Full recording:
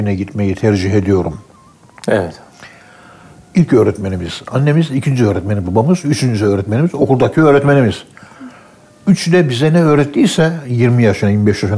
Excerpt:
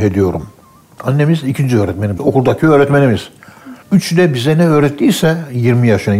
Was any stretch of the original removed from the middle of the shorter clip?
yes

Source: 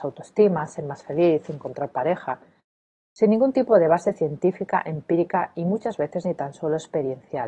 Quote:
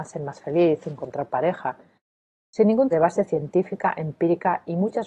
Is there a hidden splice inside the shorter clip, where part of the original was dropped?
yes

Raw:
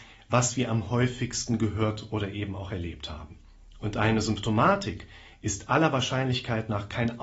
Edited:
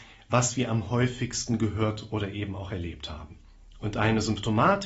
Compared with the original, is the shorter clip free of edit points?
yes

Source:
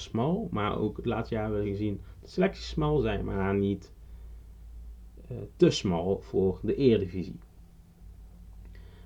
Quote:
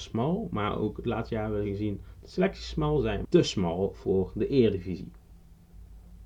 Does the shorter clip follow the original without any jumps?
no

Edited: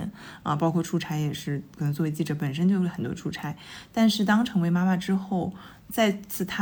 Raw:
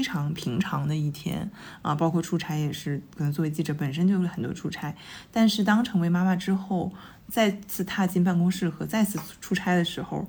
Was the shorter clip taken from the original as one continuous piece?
yes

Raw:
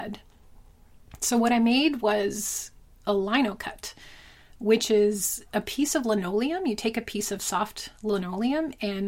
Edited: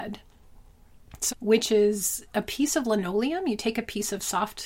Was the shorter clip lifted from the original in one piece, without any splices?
no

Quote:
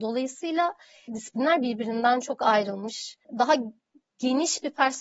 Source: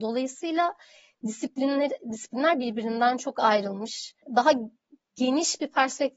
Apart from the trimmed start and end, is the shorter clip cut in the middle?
yes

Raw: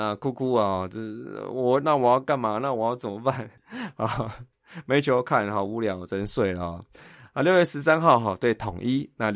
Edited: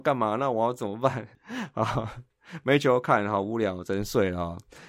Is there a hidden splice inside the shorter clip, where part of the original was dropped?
no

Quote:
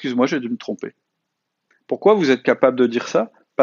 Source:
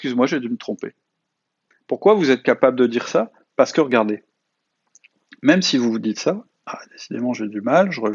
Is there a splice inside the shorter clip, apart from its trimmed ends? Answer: no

